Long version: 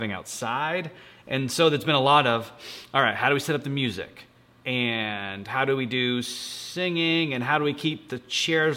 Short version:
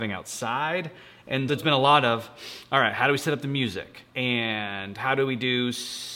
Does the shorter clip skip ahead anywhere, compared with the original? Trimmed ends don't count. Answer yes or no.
yes